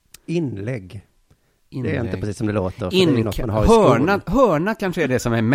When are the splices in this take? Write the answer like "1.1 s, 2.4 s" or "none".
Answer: none